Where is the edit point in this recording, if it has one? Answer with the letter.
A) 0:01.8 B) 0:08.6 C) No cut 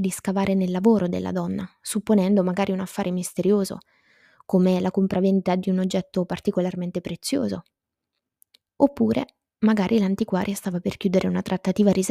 C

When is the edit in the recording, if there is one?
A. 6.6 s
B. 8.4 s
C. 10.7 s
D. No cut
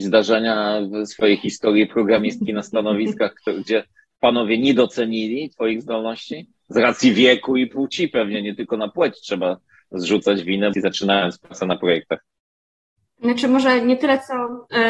C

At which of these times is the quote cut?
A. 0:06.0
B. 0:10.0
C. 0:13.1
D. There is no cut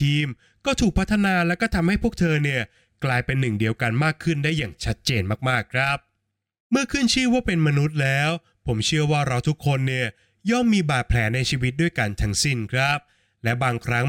D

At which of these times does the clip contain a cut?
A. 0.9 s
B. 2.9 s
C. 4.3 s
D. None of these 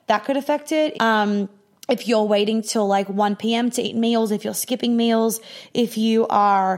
A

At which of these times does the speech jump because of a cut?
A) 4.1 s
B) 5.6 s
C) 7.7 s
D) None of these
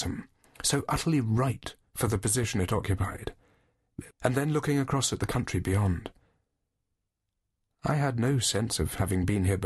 A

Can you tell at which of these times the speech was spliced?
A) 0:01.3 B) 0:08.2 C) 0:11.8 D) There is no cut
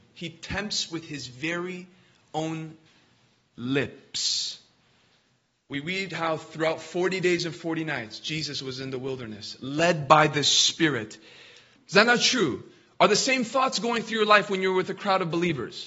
C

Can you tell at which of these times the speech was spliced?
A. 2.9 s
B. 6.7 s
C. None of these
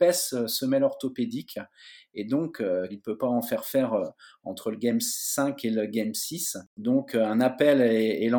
A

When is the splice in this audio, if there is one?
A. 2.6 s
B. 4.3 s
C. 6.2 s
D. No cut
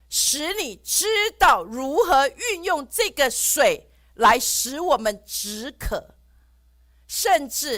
D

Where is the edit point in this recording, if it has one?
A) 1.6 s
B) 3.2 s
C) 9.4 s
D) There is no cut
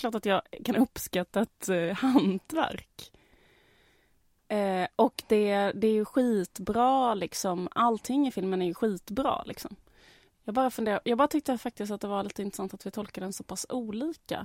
D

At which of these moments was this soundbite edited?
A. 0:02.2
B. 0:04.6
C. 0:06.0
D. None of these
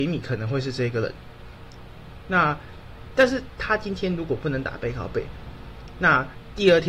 D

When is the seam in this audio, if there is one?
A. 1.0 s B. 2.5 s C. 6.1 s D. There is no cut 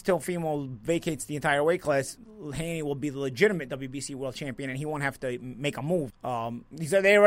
C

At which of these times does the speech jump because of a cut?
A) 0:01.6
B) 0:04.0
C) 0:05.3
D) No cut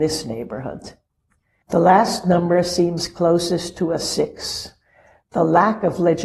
A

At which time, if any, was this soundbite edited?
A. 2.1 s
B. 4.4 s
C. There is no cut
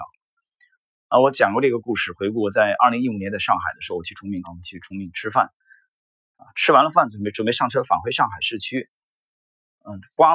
B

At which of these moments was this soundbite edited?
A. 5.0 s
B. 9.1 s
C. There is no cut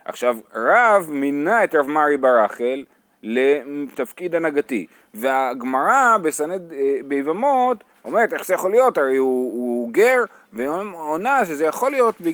C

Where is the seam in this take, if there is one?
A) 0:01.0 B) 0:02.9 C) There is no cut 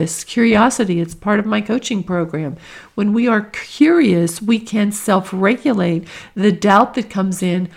C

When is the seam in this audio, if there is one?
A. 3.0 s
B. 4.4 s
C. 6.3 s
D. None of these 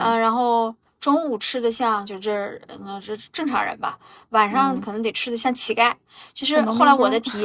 D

